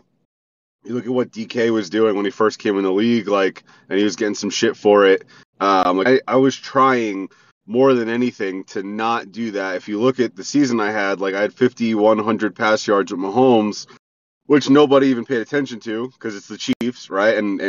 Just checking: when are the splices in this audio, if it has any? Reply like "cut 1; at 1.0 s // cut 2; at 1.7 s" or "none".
cut 1; at 6.1 s